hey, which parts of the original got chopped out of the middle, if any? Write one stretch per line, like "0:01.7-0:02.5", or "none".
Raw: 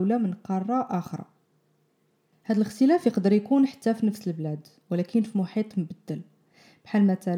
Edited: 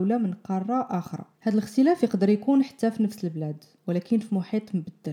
0:01.3-0:02.4